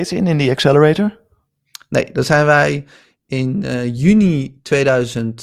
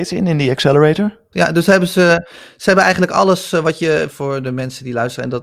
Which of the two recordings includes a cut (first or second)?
second